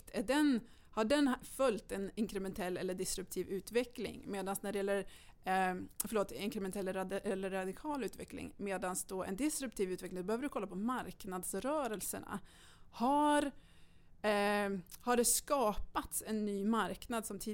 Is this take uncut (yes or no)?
yes